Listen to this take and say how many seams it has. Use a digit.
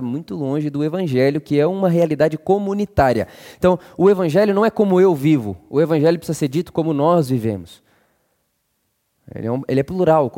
0